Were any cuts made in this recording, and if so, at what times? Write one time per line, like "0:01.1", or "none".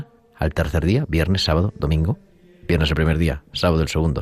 none